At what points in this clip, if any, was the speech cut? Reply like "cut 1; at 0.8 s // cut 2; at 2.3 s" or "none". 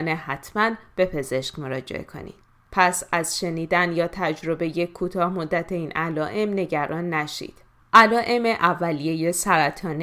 cut 1; at 2.7 s // cut 2; at 7.8 s